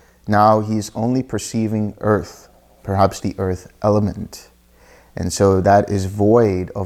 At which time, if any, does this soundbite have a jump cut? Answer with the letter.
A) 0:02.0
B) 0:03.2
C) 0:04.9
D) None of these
B